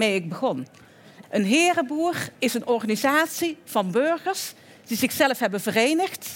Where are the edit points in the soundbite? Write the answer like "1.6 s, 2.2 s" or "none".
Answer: 1.2 s